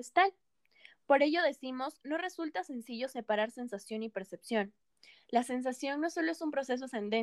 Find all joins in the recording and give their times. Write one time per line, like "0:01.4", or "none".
none

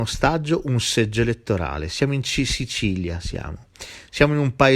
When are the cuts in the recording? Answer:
none

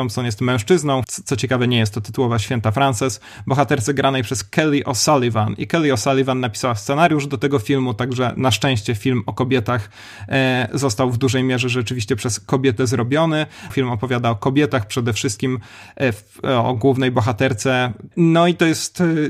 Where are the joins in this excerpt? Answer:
0:01.0
0:13.7
0:18.1

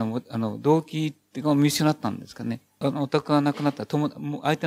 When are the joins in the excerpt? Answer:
0:02.8

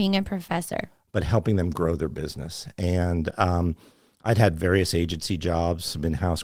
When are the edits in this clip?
0:01.1

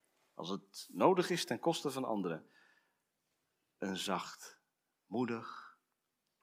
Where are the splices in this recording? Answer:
none

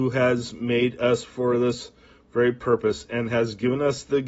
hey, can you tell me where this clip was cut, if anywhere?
none

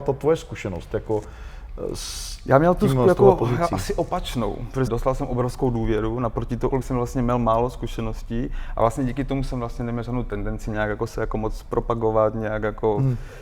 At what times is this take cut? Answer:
0:04.9
0:06.7

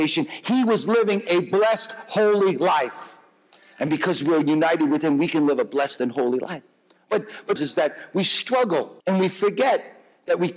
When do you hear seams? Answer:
0:07.6
0:09.0

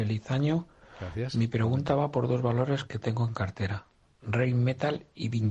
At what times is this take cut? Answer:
none

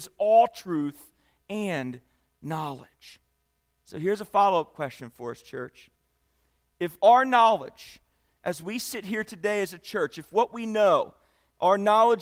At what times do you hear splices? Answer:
none

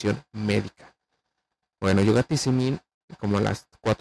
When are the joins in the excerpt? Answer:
none

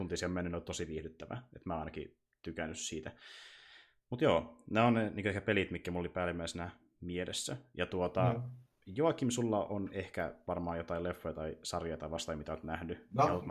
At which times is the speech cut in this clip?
none

